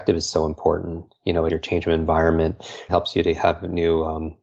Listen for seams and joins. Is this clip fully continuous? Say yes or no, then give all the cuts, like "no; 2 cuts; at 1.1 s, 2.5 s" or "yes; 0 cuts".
no; 2 cuts; at 1.5 s, 2.9 s